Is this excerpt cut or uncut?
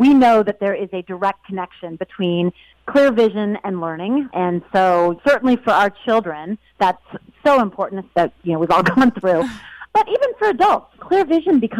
cut